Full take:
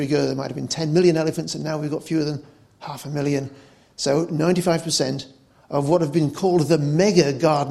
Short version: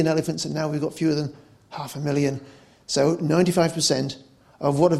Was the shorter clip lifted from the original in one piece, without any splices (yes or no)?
yes